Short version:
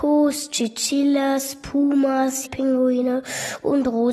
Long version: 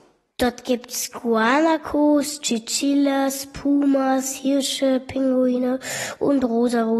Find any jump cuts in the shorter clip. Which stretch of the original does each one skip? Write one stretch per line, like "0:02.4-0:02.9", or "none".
0:04.4-0:05.0